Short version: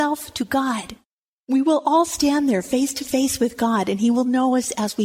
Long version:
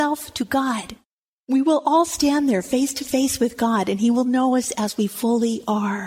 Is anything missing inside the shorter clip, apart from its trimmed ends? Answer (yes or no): no